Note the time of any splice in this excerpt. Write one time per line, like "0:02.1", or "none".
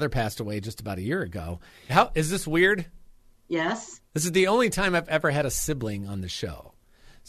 0:01.9